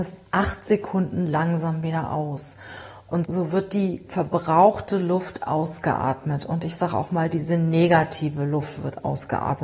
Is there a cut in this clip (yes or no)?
yes